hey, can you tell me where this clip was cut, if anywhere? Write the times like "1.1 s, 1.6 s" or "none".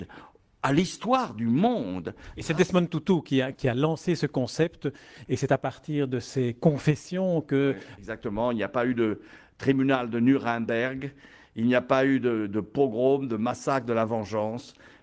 3.5 s, 5.3 s, 8.0 s